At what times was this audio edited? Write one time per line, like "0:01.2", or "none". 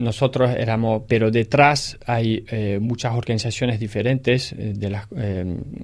0:01.1